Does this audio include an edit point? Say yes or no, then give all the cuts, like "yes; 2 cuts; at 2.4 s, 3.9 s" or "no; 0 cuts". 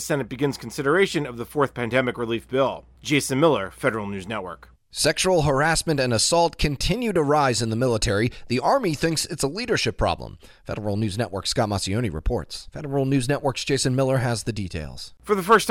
yes; 2 cuts; at 4.7 s, 12.7 s